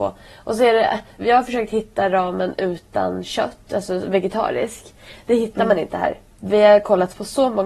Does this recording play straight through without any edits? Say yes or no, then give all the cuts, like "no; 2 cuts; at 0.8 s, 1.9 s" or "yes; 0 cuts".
no; 1 cut; at 1.2 s